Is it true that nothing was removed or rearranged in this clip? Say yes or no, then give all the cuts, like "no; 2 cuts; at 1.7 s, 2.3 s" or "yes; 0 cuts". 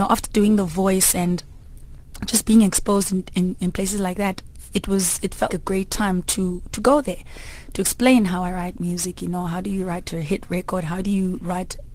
no; 1 cut; at 5.5 s